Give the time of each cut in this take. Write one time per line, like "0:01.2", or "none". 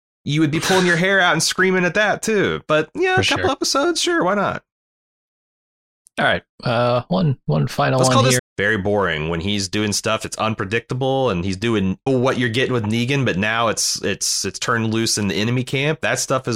0:08.4
0:12.1